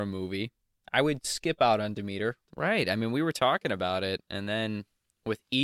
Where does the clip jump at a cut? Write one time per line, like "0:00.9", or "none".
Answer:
0:02.5